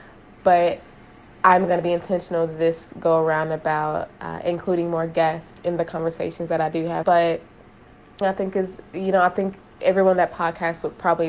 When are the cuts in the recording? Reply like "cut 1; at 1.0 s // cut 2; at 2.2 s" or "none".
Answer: cut 1; at 7.0 s // cut 2; at 8.2 s

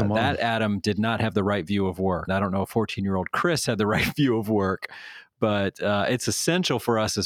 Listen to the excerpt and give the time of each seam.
cut 1; at 2.3 s

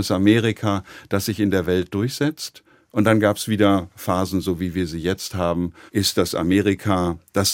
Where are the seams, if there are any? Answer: cut 1; at 5.9 s

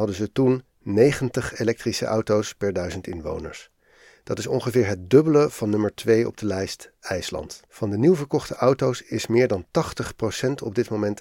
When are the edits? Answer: cut 1; at 7.7 s

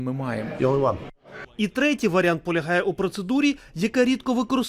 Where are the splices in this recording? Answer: cut 1; at 1.4 s

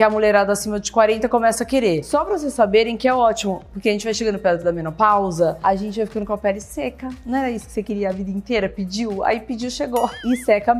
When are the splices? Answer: none

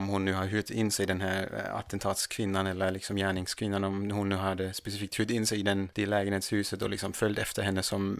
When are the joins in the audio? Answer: none

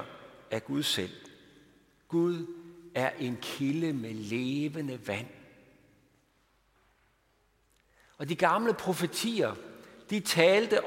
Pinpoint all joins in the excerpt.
none

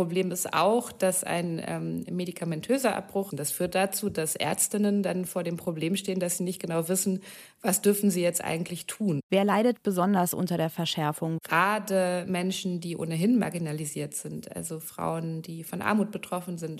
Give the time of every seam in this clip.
cut 1; at 3.3 s

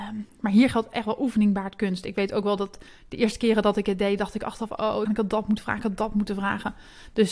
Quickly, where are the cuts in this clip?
cut 1; at 5.0 s

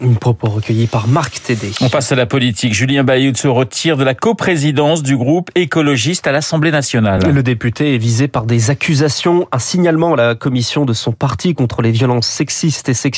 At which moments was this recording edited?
none

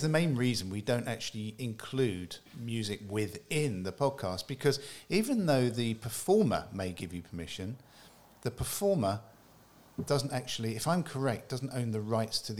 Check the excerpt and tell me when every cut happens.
cut 1; at 2.5 s

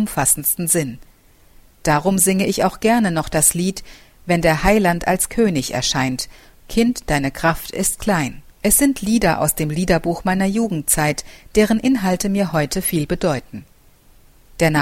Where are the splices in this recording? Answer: cut 1; at 6.6 s // cut 2; at 8.5 s

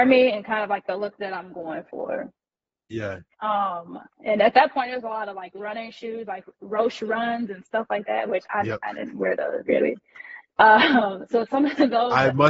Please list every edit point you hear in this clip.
none

